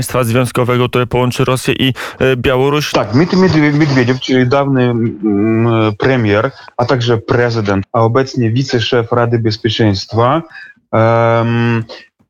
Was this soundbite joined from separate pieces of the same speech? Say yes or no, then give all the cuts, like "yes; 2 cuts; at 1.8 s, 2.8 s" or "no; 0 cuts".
yes; 2 cuts; at 2.9 s, 7.8 s